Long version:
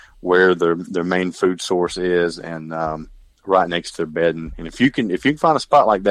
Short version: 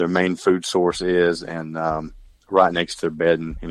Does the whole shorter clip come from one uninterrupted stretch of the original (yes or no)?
yes